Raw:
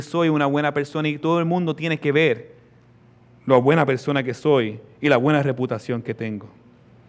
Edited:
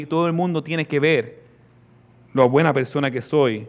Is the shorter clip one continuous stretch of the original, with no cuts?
yes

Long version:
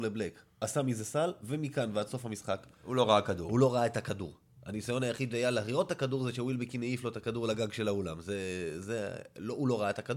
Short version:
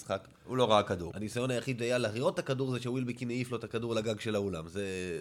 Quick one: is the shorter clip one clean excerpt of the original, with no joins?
no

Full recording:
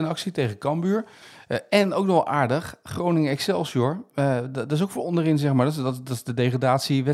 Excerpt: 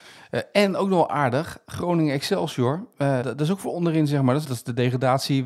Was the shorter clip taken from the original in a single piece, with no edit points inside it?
no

